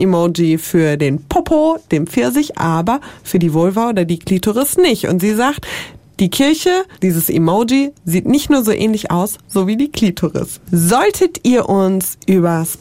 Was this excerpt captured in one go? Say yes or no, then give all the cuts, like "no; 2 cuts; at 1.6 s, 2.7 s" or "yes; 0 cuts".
no; 3 cuts; at 6.9 s, 9.4 s, 10.6 s